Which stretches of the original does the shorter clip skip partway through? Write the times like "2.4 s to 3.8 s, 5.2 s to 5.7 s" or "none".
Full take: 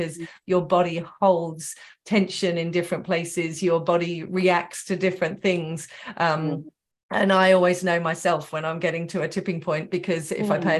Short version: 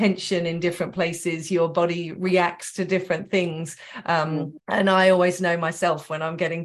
6.7 s to 7.0 s